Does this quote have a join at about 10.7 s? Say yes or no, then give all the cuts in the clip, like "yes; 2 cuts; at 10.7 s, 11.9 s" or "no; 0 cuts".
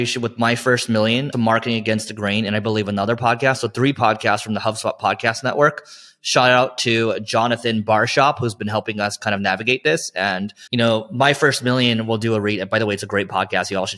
yes; 2 cuts; at 1.3 s, 10.7 s